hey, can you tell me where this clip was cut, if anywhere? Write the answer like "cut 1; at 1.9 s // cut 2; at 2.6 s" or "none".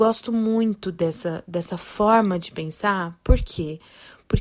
none